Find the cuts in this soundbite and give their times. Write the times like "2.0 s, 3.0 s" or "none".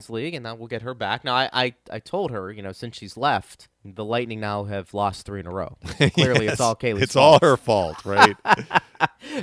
3.7 s